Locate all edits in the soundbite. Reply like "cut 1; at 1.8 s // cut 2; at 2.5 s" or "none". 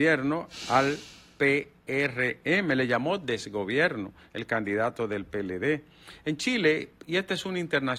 none